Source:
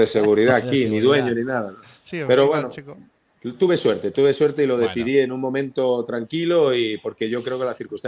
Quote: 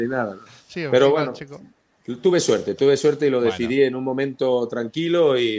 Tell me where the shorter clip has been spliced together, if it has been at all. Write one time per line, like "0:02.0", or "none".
none

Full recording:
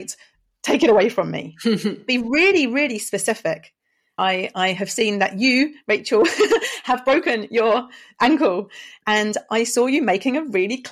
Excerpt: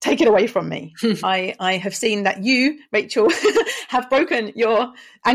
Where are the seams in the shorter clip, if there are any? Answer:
0:01.2

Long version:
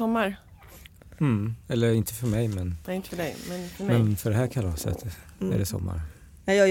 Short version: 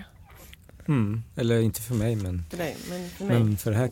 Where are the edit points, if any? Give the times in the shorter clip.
0:02.5

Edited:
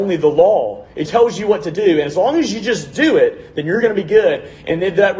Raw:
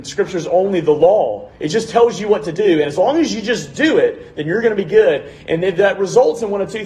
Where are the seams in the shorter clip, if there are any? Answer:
0:01.1

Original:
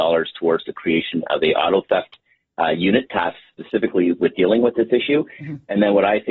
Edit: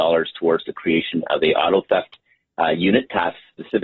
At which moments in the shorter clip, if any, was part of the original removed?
none

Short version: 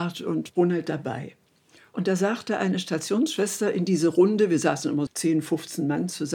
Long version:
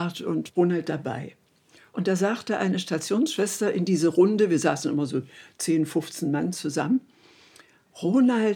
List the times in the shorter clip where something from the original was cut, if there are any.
0:05.1

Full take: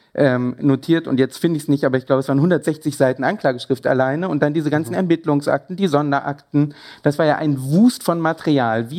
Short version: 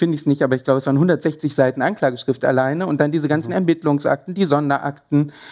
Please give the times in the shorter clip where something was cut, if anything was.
none

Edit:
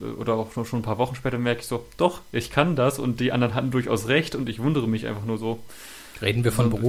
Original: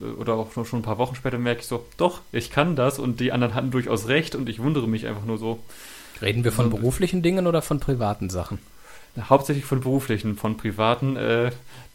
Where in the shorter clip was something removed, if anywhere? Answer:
none

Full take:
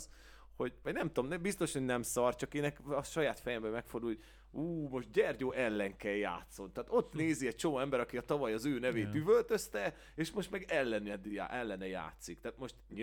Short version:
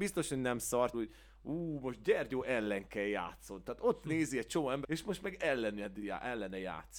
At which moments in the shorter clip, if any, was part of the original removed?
0:00.9
0:04.8

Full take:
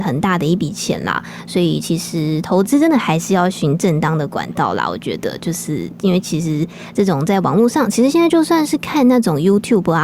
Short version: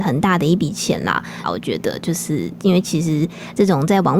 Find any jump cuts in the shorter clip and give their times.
0:01.4

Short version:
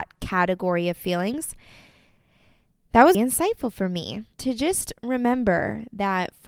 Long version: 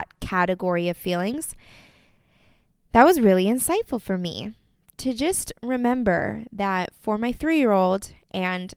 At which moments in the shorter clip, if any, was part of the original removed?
0:03.1
0:04.3

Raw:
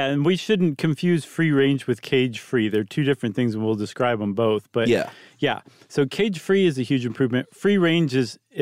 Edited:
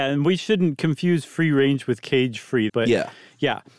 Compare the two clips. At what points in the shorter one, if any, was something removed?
0:02.7

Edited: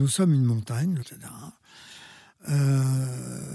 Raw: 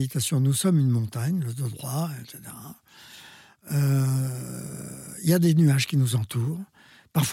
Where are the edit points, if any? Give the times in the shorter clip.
0:01.0

